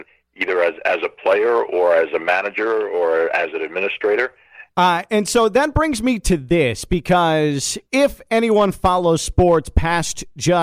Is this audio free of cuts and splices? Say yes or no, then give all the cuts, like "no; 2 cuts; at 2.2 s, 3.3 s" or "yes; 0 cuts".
no; 2 cuts; at 4.7 s, 7.9 s